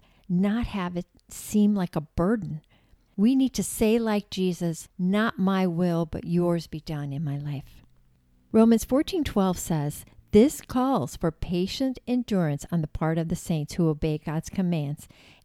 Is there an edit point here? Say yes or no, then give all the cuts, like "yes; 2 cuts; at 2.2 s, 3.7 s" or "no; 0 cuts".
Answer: yes; 1 cut; at 3.1 s